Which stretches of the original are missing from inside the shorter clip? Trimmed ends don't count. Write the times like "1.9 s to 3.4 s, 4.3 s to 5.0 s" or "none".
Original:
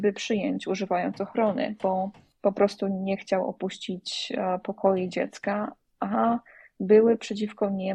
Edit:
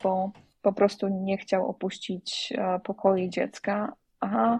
none